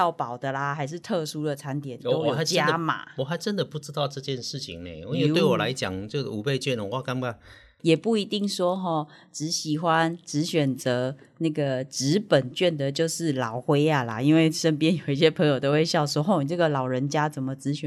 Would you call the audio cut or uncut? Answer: cut